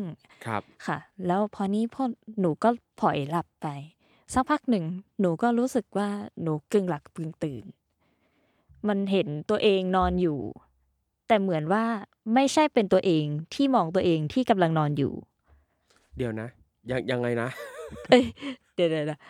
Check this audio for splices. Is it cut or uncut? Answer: uncut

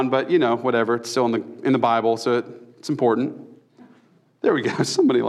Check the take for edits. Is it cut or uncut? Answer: uncut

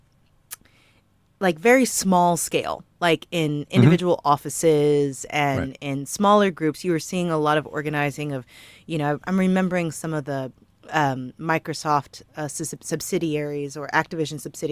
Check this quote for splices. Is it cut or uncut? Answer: uncut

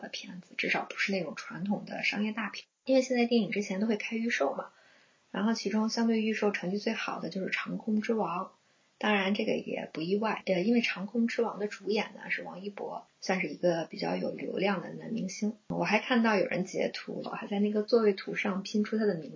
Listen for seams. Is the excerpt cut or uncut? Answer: cut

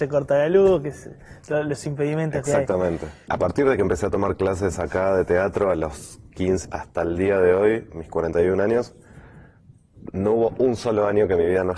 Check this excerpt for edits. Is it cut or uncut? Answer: cut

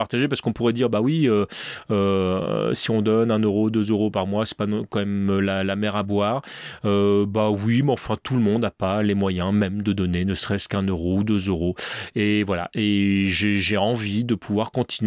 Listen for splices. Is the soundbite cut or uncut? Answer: uncut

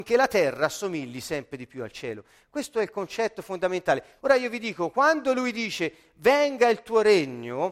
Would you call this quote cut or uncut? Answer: cut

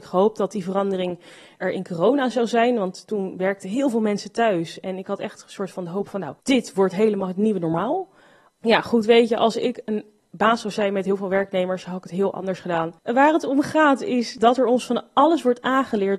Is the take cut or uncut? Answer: cut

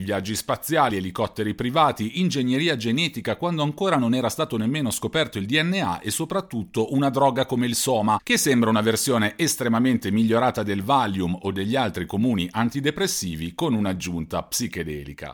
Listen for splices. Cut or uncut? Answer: uncut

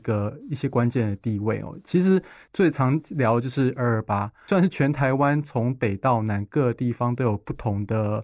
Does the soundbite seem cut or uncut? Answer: uncut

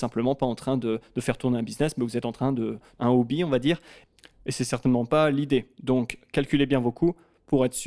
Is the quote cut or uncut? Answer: cut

